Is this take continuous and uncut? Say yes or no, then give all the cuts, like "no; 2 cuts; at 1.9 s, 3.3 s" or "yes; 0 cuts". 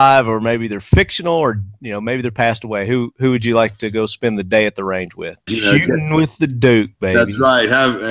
no; 1 cut; at 5.5 s